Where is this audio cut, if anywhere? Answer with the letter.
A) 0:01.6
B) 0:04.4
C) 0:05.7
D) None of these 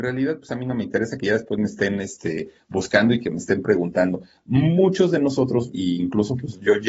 C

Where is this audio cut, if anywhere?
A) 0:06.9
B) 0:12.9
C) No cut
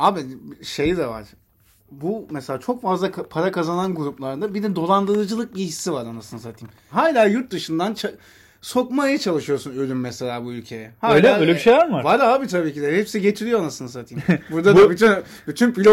A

